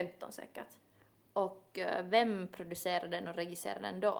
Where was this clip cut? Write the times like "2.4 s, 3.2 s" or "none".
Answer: none